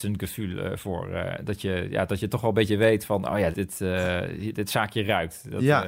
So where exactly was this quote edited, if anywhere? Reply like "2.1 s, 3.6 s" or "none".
3.5 s, 4.5 s